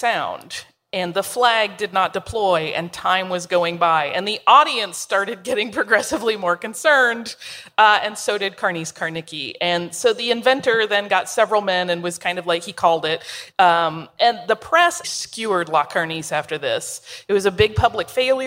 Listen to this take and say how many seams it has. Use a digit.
2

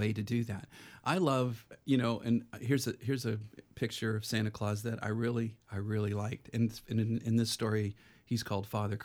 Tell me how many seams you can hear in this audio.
0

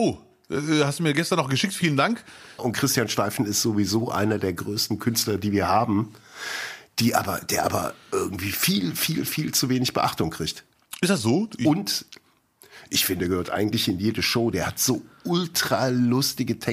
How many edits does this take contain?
3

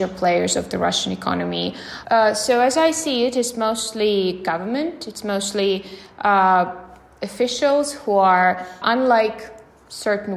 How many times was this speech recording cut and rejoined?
2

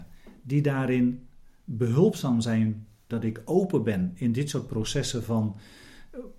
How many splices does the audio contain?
1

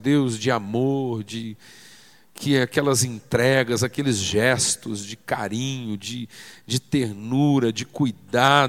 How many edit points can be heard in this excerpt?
0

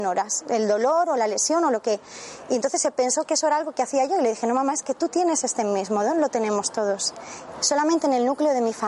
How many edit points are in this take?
1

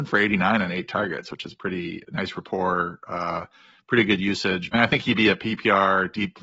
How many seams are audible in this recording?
1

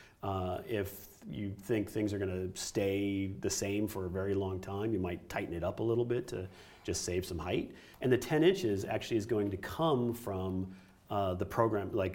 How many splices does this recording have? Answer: 1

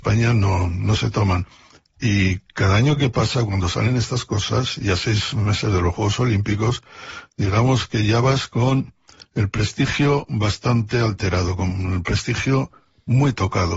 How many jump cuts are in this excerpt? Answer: 0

